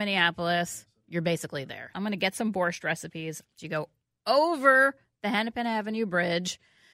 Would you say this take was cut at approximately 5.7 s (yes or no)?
no